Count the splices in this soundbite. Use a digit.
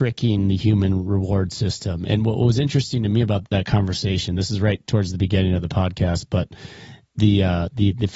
1